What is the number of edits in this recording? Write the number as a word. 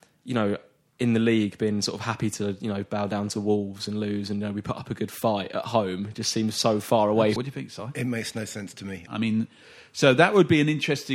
two